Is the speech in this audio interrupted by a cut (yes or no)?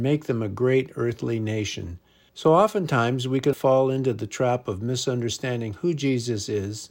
yes